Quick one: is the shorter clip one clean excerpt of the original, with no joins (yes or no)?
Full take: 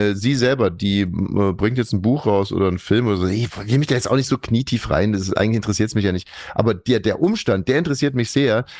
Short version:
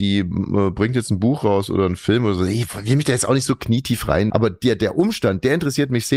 no